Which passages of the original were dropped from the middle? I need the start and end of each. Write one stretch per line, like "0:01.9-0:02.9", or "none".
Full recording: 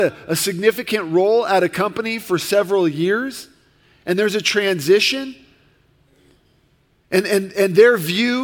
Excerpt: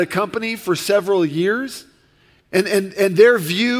0:04.0-0:07.0